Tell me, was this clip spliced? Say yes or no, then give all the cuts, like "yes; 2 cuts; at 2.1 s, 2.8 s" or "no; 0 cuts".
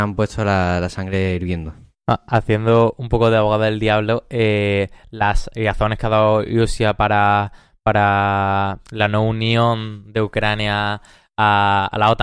no; 0 cuts